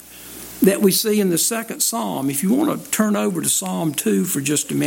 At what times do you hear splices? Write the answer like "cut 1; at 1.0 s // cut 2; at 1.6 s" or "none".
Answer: none